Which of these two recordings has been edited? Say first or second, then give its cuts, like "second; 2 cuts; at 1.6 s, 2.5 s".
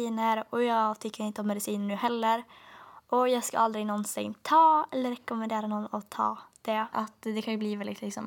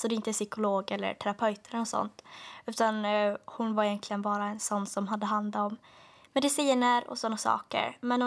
first; 1 cut; at 6.9 s